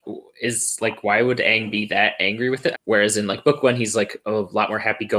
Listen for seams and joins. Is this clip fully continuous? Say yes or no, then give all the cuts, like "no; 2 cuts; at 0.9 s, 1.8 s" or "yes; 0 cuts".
no; 1 cut; at 2.7 s